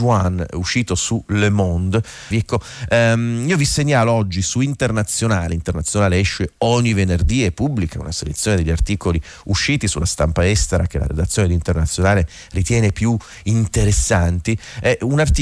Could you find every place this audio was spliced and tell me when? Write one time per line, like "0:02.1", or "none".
0:02.3